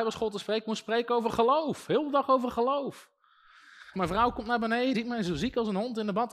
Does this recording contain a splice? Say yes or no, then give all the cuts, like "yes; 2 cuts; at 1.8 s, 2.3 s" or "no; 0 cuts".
yes; 2 cuts; at 3.9 s, 4.9 s